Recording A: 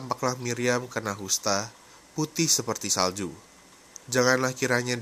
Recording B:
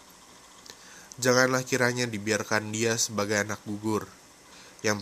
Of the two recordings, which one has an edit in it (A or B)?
A